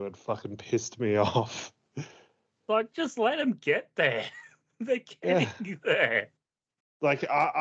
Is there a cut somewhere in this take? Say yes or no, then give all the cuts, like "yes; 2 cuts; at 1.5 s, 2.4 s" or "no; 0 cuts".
no; 0 cuts